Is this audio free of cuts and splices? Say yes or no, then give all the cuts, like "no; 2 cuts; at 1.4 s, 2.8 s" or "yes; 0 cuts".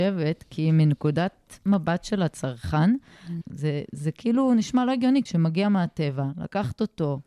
no; 2 cuts; at 3.4 s, 5.3 s